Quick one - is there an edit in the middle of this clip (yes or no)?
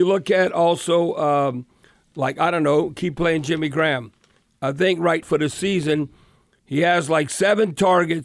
yes